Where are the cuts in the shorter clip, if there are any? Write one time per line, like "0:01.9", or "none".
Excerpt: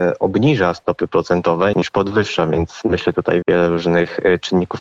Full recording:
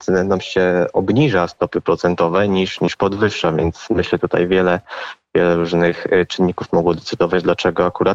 0:01.7
0:03.4